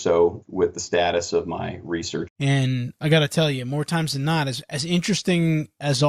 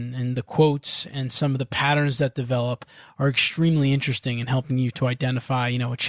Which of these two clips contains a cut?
first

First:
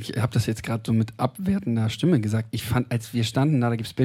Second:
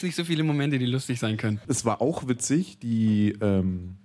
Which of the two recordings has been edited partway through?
second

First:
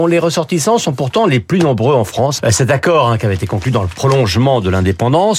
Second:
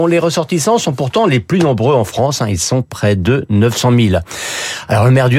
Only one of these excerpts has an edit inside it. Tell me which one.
first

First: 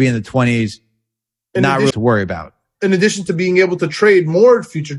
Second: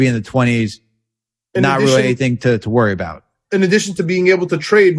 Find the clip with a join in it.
first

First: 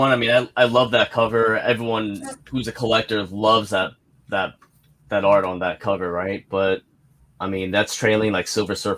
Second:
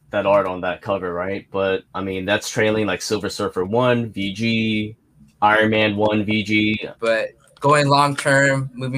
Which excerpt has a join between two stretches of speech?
second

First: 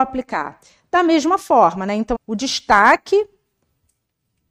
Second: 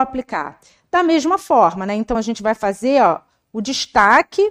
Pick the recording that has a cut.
first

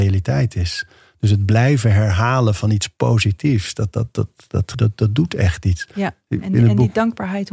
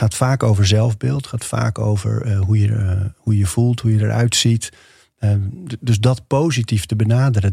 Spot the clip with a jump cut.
first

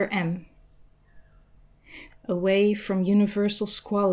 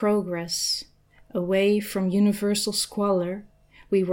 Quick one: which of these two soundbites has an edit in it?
first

